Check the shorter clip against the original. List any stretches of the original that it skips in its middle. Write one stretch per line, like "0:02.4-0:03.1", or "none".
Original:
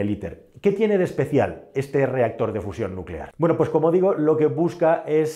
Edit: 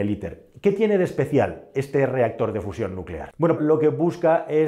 0:03.6-0:04.2